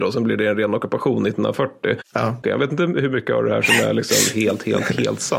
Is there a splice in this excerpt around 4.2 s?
no; 1 cut; at 2.4 s

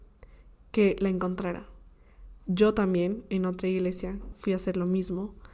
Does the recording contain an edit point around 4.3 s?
yes; 1 cut; at 4.3 s

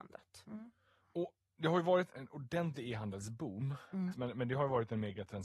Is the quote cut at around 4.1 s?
yes; 2 cuts; at 2.1 s, 4.1 s

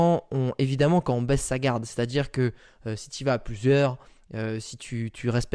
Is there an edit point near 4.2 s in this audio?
no; 0 cuts

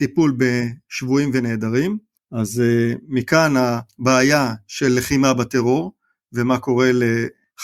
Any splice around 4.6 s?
no; 1 cut; at 2.2 s

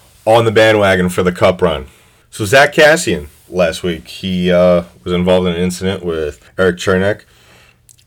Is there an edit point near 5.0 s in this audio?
no; 2 cuts; at 2.2 s, 6.5 s

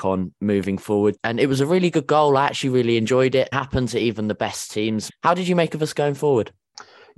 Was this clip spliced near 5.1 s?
yes; 3 cuts; at 1.2 s, 3.5 s, 5.1 s

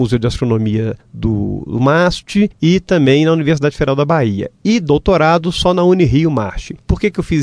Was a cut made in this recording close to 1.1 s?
no; 0 cuts

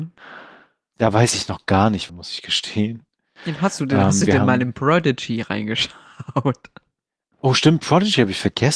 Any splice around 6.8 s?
no; 2 cuts; at 0.9 s, 2.1 s

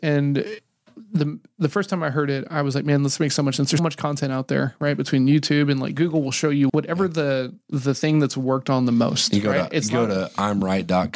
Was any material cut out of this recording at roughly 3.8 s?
yes; 2 cuts; at 3.8 s, 6.7 s

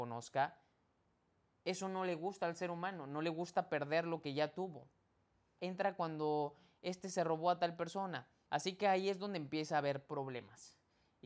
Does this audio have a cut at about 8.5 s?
yes; 2 cuts; at 5.6 s, 8.5 s

